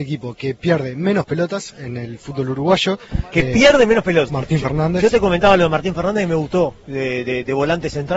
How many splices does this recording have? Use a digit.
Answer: 1